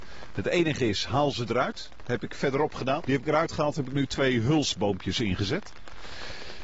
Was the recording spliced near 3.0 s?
yes; 1 cut; at 3.0 s

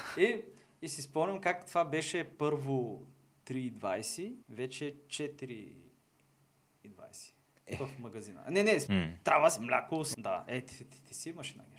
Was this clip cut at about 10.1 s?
yes; 3 cuts; at 4.4 s, 8.9 s, 10.1 s

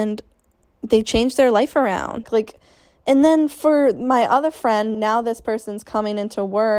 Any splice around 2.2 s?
yes; 2 cuts; at 2.2 s, 4.9 s

